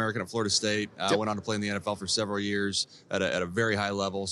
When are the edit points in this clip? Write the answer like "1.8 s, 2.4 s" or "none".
none